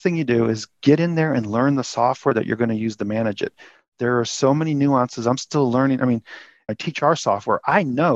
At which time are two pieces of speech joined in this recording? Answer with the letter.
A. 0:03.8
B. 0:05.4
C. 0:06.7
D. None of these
C